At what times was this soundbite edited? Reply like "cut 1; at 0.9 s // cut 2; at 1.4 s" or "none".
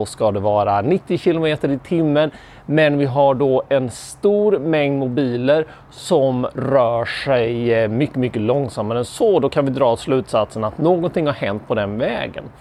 none